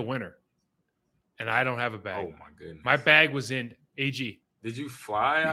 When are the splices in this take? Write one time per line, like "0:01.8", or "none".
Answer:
0:04.4